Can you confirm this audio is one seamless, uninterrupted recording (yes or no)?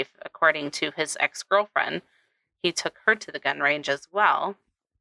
yes